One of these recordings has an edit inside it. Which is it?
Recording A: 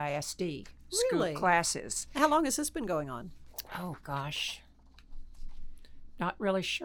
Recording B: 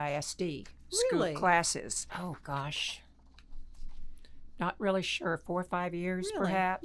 B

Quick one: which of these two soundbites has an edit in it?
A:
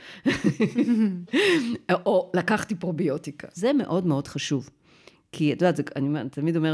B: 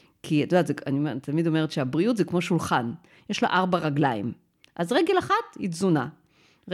A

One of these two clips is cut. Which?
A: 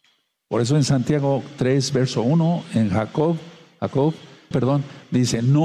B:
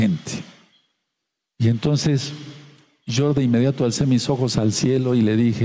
A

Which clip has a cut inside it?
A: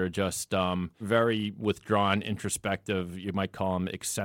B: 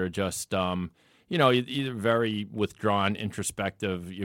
A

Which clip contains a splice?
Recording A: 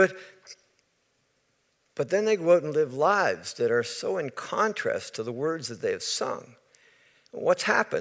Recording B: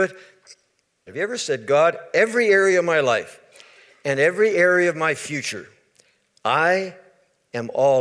B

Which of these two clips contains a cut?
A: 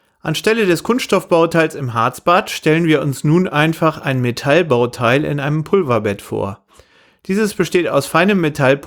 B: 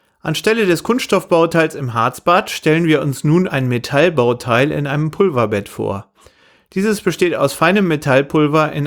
B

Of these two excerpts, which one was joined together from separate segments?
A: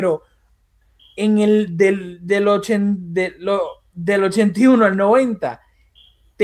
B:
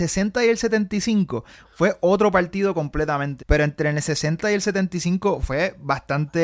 B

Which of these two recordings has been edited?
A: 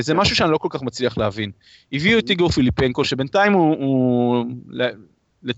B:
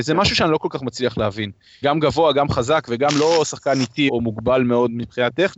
B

